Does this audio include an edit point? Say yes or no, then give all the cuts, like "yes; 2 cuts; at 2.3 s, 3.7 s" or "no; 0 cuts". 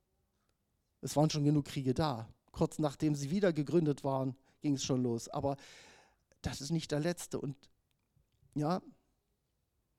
no; 0 cuts